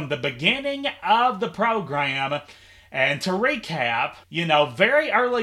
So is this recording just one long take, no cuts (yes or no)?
no